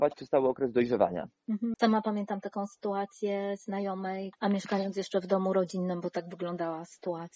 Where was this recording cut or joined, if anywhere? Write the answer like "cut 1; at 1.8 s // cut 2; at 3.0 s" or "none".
cut 1; at 1.7 s // cut 2; at 4.3 s